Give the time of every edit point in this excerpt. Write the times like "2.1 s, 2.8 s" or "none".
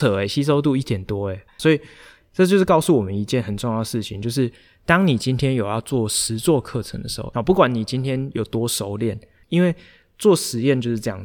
1.6 s, 7.3 s, 9.4 s